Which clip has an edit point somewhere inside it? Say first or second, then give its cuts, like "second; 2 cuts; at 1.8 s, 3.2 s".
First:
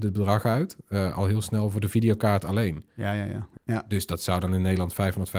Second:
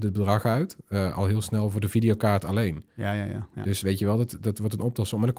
first; 1 cut; at 3.6 s